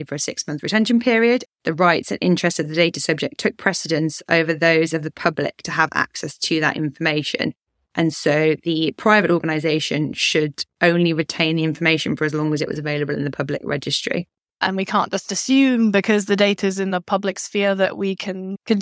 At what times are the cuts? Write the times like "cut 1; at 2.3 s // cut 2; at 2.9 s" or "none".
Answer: cut 1; at 1.4 s // cut 2; at 14.5 s